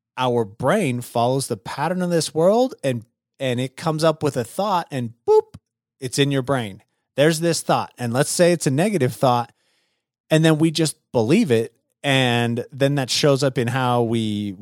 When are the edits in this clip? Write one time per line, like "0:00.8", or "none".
none